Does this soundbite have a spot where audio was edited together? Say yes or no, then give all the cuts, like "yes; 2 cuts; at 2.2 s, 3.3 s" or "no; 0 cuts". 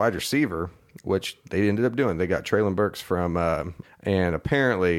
yes; 1 cut; at 3.8 s